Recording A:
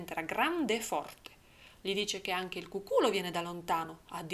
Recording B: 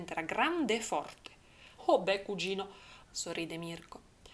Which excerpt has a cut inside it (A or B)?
B